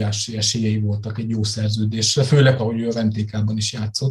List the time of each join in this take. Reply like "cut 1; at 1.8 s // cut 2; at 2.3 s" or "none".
cut 1; at 2.6 s

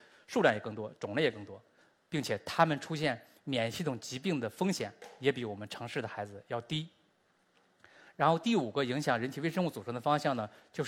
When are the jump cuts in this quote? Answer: none

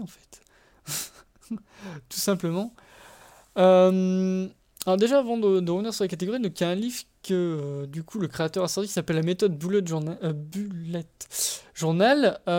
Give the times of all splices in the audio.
none

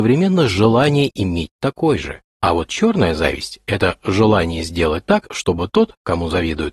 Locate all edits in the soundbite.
none

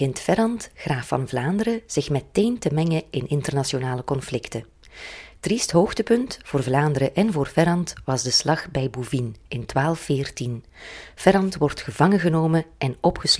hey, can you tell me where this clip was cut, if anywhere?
none

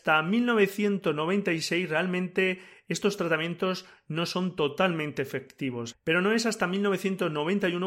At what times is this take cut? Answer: cut 1; at 5.9 s

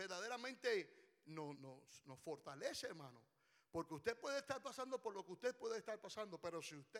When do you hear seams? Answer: cut 1; at 1.5 s

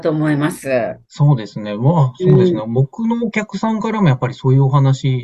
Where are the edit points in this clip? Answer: cut 1; at 1.0 s

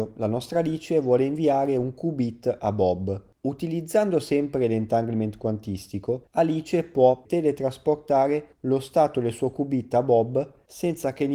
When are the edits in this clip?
cut 1; at 7.2 s

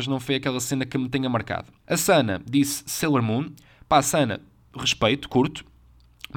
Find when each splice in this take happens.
cut 1; at 1.8 s

